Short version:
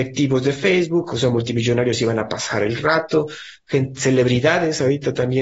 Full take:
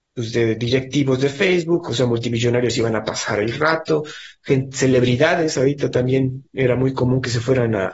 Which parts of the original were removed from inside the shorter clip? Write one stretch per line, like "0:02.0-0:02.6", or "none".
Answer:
none